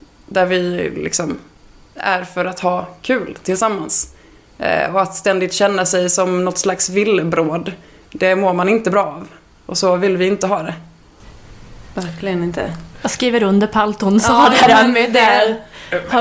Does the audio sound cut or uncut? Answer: uncut